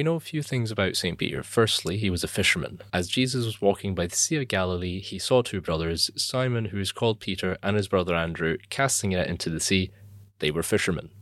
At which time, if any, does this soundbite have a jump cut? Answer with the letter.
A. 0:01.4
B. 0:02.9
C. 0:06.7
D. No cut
B